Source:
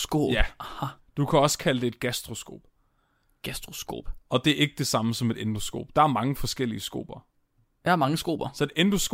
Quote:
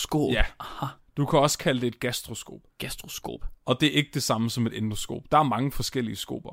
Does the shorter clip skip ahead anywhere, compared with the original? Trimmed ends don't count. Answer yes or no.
yes